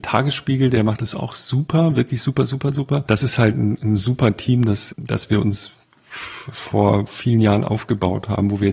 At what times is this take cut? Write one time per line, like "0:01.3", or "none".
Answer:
0:03.1
0:04.9